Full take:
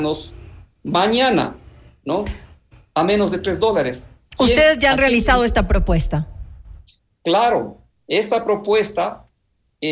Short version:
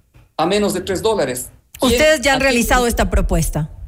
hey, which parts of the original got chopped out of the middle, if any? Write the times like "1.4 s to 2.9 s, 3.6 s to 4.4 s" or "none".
none